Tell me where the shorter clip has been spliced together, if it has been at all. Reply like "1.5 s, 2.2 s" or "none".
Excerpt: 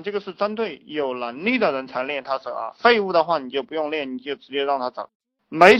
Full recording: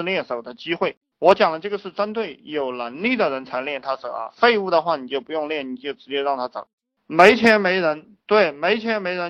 none

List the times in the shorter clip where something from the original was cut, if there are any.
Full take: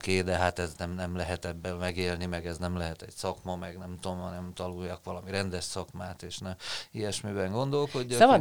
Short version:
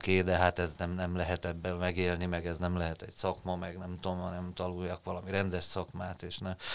none

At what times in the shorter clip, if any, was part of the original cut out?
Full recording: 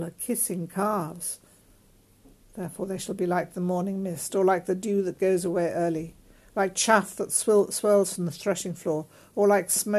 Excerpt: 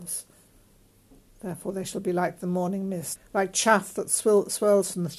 3.2 s

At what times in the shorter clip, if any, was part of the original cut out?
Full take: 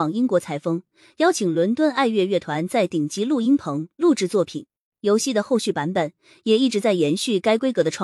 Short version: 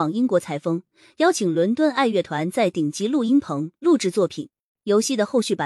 2.1 s

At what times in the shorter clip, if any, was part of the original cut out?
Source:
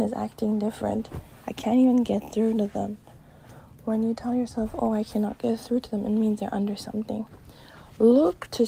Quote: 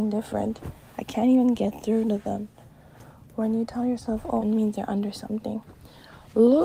4.4 s

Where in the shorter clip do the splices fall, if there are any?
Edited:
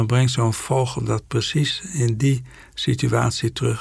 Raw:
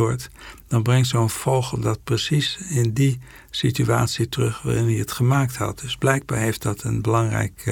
none

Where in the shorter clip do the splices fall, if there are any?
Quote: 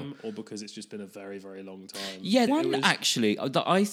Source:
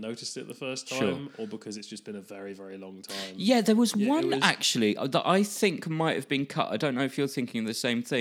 2.5 s

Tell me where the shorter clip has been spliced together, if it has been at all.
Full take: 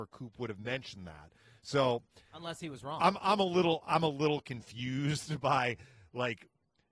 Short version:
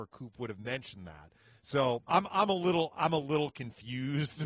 2.1 s

